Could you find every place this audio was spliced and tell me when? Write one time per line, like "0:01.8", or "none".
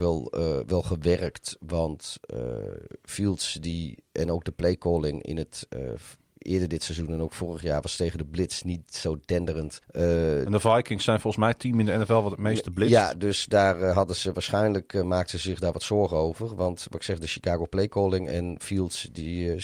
0:09.8

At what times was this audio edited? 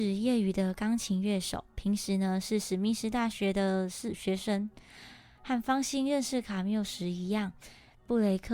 none

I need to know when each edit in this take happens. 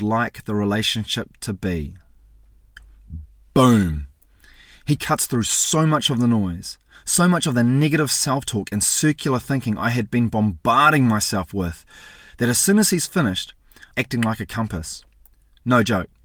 0:13.9

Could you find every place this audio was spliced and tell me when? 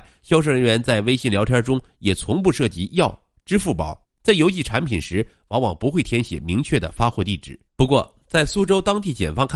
0:04.0
0:07.7

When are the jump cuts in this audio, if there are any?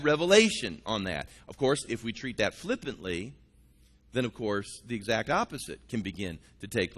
none

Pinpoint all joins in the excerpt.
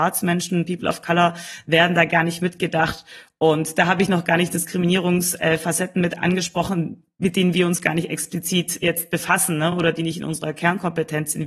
none

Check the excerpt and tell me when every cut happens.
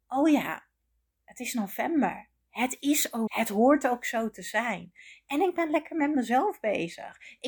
0:03.3

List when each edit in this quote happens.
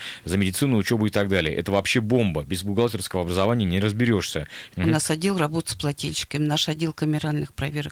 0:04.7

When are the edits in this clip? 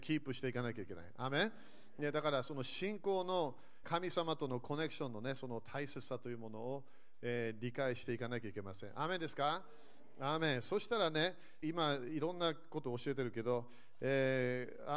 0:03.8
0:11.6

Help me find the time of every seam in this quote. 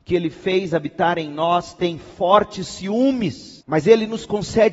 0:03.6

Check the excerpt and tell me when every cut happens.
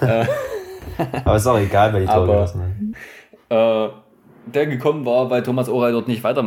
0:02.9

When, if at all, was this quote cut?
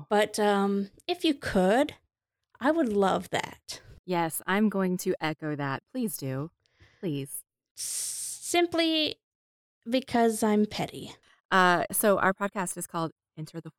0:11.9

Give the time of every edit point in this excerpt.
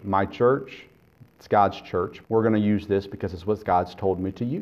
0:02.2

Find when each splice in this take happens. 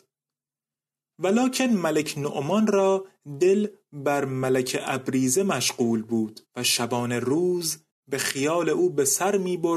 0:01.1
0:06.5

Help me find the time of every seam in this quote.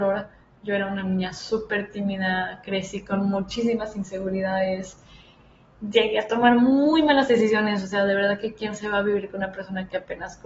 none

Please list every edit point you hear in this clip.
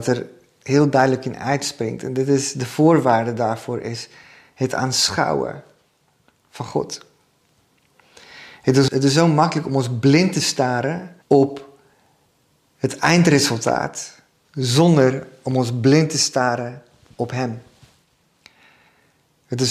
0:08.9
0:11.2

